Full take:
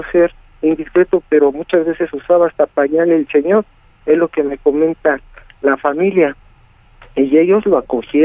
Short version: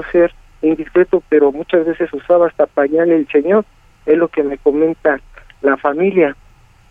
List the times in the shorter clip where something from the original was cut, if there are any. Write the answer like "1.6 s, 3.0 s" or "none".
none